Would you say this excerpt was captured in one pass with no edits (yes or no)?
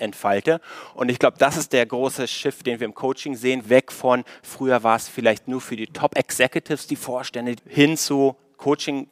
no